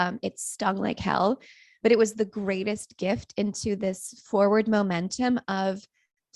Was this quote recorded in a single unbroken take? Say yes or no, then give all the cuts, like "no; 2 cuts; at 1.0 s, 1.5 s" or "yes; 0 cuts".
yes; 0 cuts